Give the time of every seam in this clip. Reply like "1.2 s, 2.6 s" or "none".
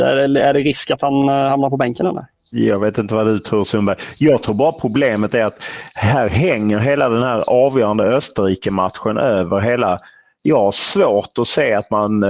2.5 s